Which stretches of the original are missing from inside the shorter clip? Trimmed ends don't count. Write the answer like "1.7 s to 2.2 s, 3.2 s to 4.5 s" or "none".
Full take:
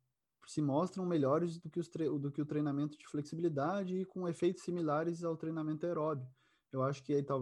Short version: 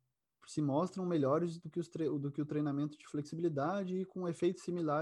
none